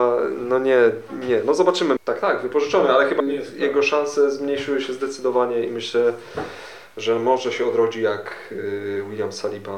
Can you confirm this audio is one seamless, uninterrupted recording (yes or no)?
no